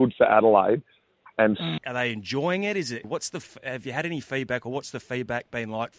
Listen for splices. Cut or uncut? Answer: cut